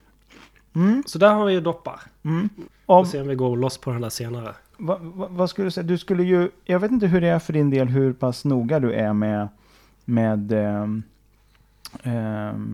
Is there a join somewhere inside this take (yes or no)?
yes